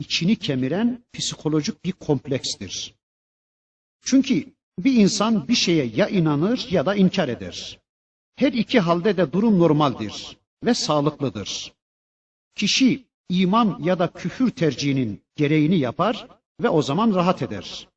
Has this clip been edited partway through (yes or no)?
no